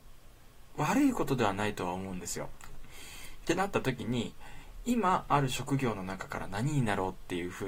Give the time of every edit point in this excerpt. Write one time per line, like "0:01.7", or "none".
0:02.7